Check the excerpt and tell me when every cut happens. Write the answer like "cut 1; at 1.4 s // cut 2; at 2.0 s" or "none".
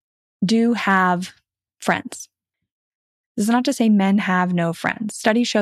none